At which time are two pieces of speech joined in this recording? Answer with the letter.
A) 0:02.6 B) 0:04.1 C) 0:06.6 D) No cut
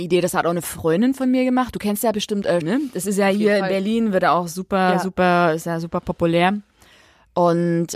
A